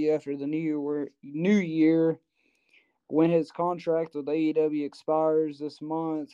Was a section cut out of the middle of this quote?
no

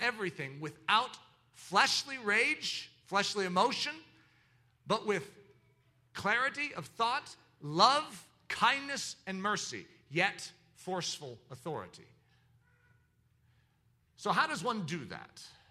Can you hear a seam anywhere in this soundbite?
no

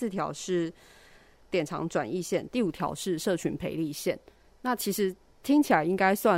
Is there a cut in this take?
no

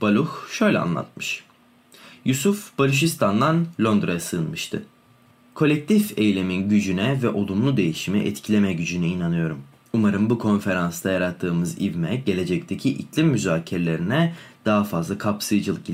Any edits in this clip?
no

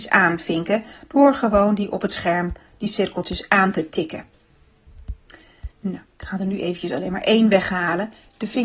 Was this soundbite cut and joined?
no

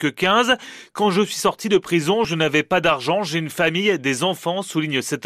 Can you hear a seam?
no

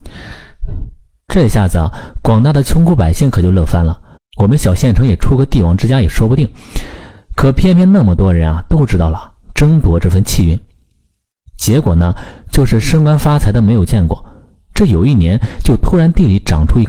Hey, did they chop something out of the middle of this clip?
yes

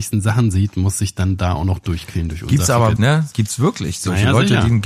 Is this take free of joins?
no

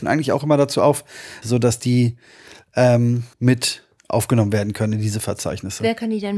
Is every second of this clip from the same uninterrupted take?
no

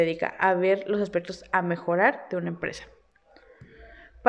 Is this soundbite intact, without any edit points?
yes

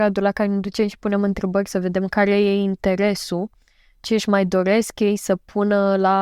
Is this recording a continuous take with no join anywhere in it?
yes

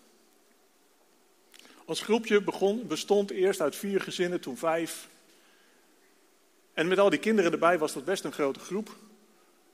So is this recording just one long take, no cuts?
yes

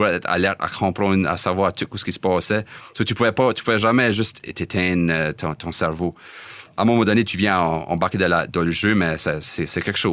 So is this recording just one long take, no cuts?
yes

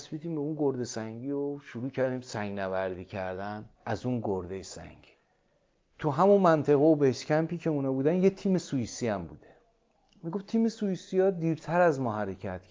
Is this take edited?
yes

